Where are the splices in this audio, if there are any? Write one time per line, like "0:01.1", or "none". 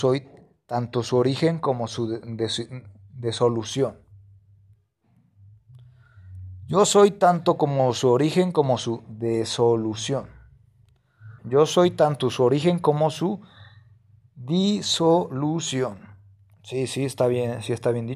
0:11.4